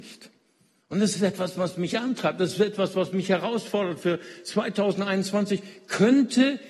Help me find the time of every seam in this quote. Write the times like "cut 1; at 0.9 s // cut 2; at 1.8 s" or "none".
none